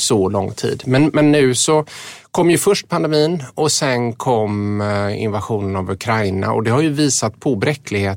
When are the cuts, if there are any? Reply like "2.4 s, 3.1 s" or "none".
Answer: none